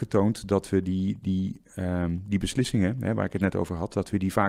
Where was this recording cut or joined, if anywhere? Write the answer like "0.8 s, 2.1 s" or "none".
none